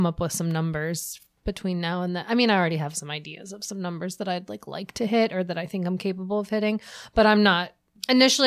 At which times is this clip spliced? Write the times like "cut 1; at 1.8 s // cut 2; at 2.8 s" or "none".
none